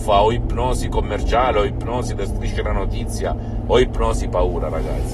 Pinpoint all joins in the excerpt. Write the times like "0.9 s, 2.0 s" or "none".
none